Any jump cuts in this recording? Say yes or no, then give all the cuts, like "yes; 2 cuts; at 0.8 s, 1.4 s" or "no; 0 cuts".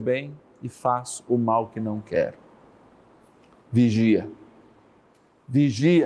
no; 0 cuts